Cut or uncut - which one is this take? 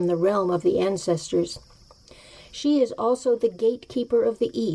uncut